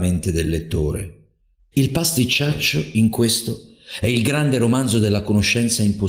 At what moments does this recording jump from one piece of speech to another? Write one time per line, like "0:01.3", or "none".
0:01.7